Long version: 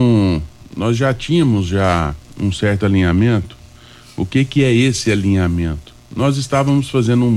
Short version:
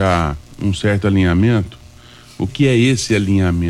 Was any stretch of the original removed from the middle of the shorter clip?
yes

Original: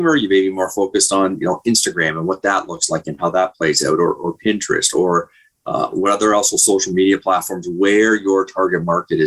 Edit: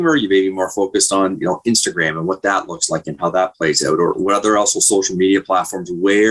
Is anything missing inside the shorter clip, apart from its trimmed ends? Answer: yes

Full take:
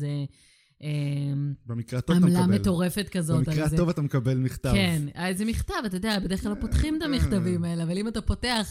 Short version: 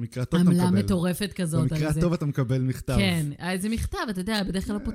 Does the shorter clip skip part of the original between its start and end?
no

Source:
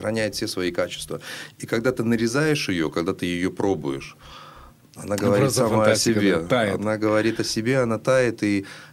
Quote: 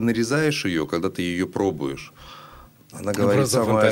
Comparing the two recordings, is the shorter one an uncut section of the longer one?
yes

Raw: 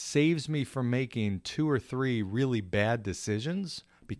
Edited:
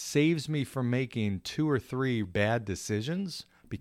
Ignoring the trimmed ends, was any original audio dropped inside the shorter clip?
yes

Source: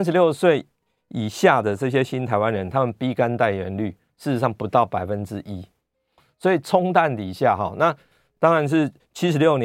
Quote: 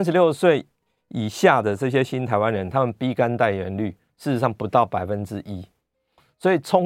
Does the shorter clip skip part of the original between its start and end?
no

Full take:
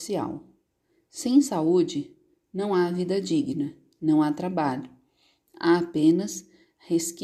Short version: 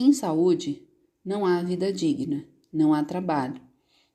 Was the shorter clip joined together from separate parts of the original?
no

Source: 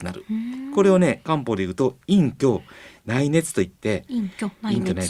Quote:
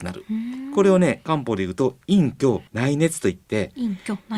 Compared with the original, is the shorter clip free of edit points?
no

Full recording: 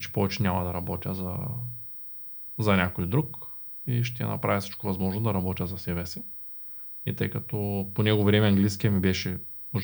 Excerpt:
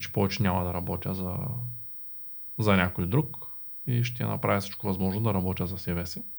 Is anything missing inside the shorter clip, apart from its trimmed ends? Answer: no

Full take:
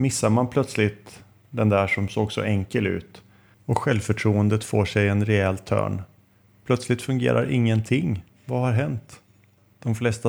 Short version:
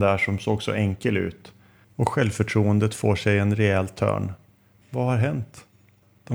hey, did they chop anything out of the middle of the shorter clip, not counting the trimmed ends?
yes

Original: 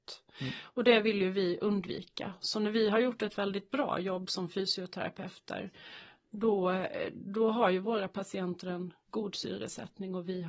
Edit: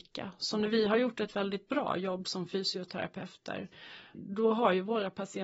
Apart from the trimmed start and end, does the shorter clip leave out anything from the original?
yes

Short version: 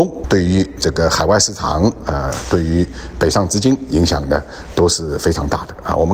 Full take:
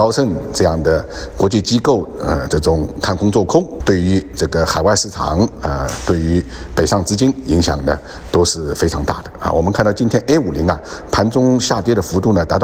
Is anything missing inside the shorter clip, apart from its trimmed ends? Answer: no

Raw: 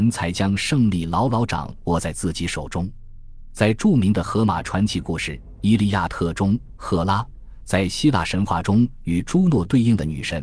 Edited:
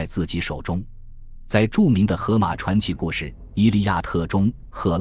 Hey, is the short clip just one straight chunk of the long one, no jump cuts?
yes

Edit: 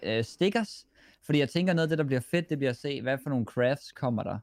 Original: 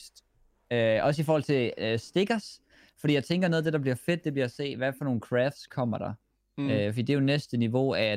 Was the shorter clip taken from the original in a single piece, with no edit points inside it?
yes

